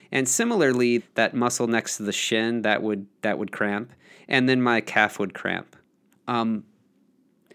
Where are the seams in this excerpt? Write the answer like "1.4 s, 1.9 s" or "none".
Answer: 1.0 s, 6.1 s